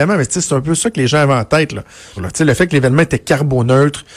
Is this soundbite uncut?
no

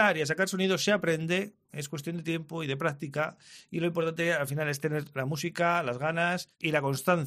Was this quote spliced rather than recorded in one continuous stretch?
no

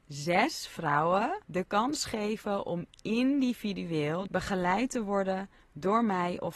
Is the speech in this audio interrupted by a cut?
yes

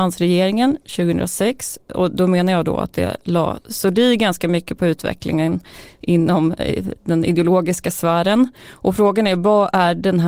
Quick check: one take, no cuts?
yes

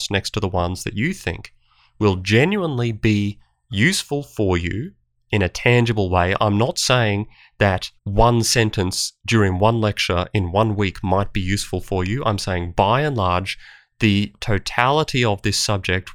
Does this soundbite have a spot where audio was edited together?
yes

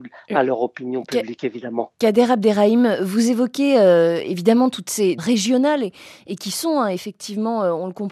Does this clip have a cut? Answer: yes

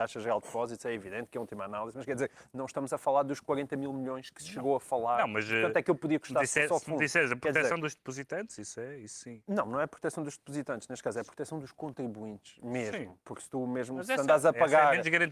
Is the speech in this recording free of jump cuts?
no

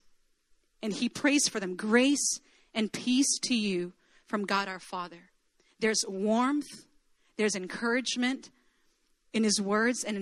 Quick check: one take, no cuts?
yes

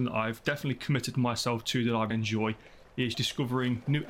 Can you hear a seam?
yes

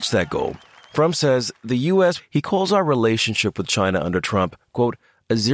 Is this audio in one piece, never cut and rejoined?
no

